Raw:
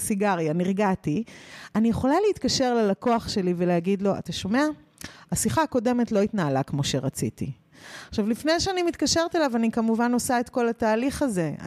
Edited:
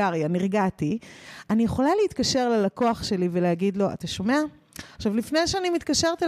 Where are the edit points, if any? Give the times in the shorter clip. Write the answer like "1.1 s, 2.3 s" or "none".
5.0 s

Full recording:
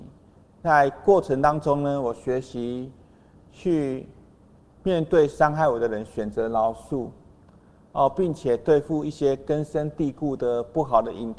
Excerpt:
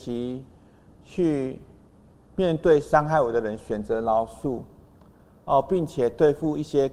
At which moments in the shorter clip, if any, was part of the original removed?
none

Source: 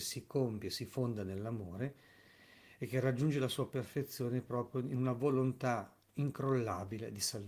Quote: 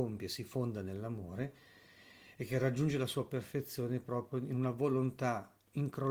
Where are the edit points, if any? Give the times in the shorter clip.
none

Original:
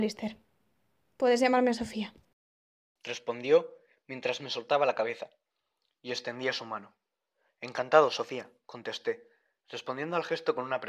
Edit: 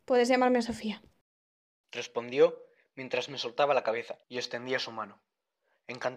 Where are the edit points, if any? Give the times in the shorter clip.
4.2 s

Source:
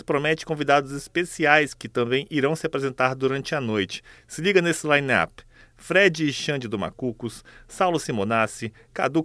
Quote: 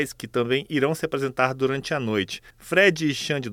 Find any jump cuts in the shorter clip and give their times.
2.5 s

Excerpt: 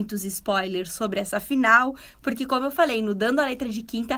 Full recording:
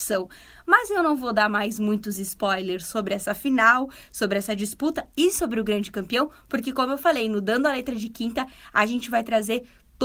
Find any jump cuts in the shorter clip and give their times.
2.1 s

